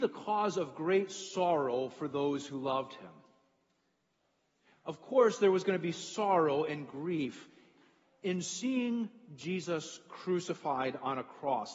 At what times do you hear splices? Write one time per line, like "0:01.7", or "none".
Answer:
none

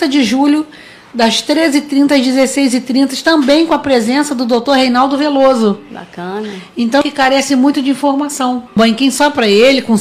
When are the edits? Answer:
0:07.0
0:08.8

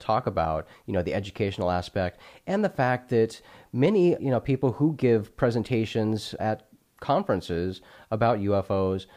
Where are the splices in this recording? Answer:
0:04.2
0:06.4

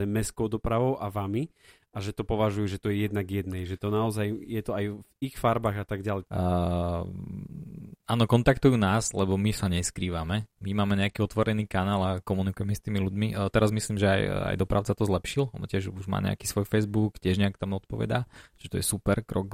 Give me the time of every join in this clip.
0:06.2

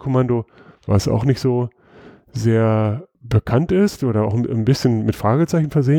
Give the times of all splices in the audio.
0:03.1

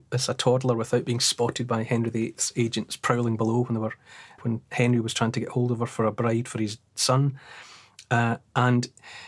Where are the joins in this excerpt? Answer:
0:04.4

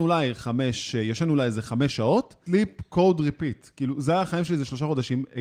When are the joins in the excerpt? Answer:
0:02.5

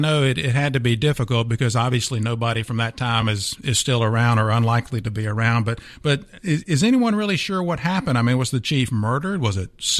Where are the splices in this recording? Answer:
none

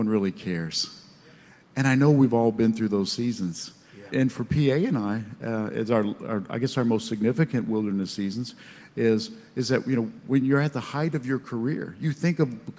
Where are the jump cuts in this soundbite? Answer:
0:04.1

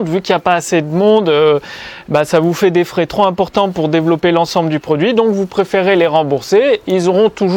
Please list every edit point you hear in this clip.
none

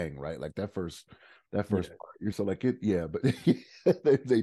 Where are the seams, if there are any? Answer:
0:02.3

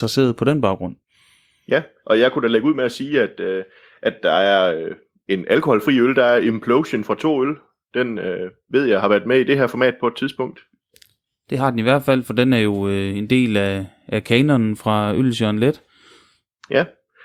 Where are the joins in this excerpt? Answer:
none

